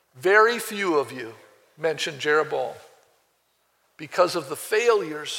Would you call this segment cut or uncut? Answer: cut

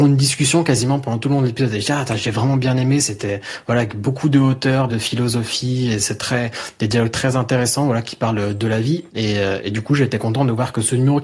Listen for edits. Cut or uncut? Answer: cut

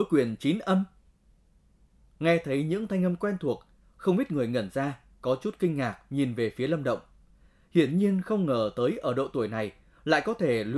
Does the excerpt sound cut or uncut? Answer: uncut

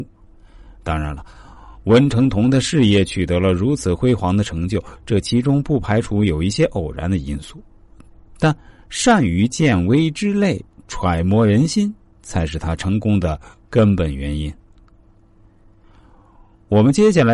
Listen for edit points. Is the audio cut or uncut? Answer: uncut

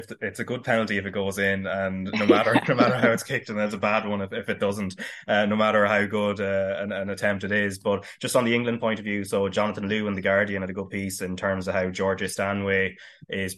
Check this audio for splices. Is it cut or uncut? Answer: uncut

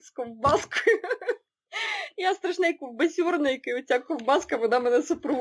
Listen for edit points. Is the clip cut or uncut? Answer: uncut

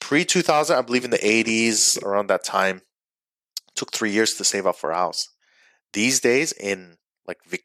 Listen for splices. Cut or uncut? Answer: uncut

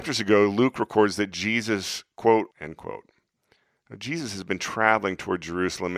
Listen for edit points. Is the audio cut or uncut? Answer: cut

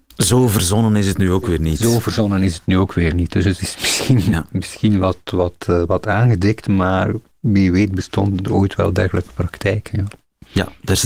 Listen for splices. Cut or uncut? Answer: uncut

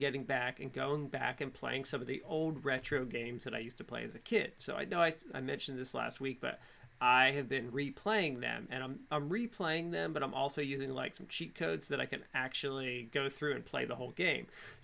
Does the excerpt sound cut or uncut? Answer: uncut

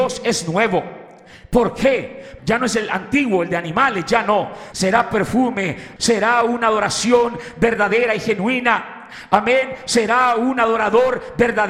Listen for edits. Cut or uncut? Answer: cut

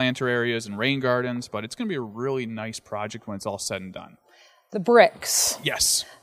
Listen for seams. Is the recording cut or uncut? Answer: uncut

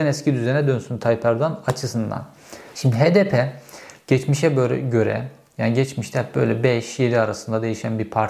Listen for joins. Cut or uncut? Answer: cut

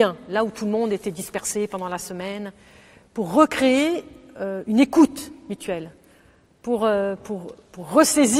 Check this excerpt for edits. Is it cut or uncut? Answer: uncut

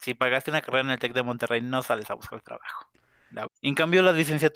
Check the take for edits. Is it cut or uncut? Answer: cut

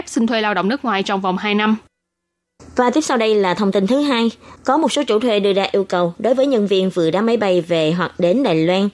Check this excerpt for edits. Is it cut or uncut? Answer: uncut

